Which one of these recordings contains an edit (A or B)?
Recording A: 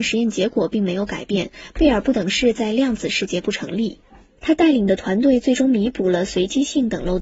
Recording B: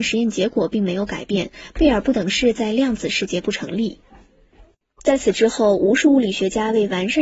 A